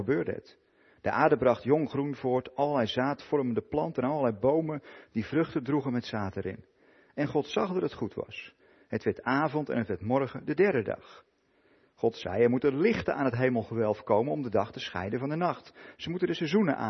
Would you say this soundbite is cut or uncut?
uncut